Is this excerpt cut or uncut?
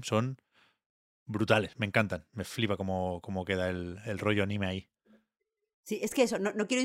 uncut